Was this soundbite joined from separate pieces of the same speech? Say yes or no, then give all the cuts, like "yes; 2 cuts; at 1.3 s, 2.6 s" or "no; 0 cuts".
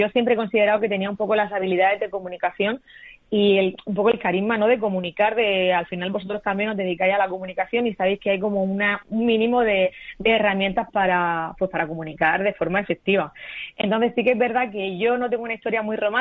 yes; 1 cut; at 10.9 s